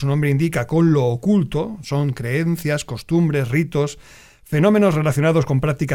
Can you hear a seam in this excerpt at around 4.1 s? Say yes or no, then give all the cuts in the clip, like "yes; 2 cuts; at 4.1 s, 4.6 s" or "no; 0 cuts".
no; 0 cuts